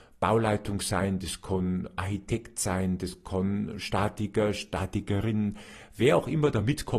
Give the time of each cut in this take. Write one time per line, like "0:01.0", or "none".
none